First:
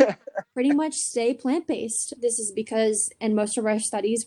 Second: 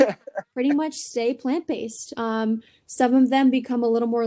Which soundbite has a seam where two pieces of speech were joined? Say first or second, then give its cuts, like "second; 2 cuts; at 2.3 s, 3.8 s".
first; 1 cut; at 2.1 s